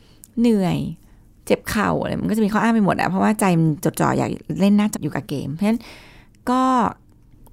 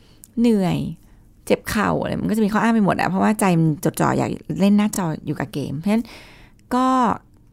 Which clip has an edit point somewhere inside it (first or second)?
first